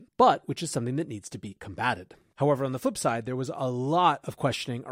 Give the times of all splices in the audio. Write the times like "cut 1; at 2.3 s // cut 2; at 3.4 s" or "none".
none